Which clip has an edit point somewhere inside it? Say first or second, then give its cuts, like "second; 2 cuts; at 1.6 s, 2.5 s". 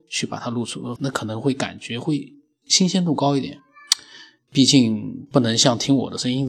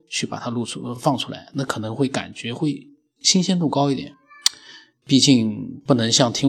first; 1 cut; at 1.0 s